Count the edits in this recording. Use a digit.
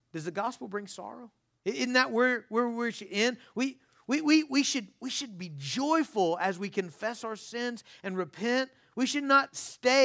1